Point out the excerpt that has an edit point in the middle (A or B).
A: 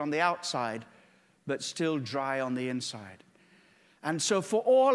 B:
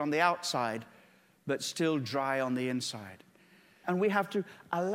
B